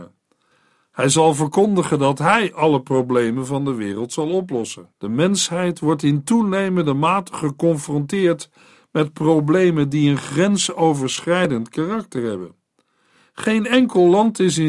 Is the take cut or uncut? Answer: cut